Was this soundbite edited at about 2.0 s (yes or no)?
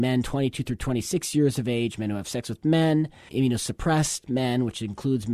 no